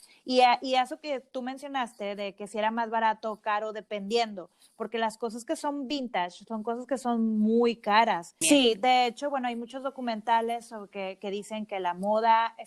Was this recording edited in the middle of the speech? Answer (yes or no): yes